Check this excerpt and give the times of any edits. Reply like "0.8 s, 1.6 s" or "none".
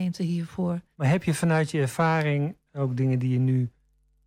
0.9 s, 2.7 s